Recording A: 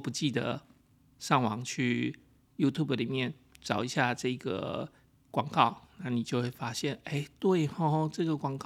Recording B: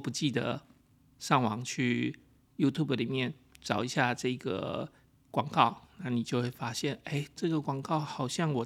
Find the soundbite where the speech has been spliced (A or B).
B